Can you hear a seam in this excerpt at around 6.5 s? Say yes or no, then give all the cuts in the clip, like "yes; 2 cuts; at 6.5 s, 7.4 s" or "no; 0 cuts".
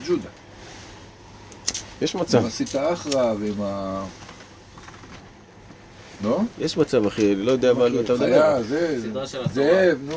no; 0 cuts